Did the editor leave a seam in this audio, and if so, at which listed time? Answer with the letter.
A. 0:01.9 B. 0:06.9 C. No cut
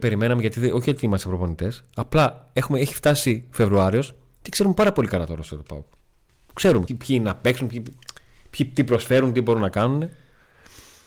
B